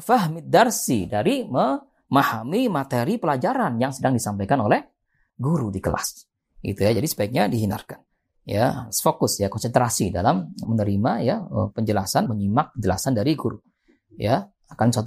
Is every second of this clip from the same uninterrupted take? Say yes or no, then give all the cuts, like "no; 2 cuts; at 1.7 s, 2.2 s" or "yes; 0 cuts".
no; 2 cuts; at 10.6 s, 12.2 s